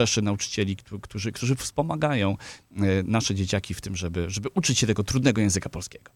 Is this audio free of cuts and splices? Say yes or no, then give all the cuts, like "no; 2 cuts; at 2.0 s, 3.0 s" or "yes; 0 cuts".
yes; 0 cuts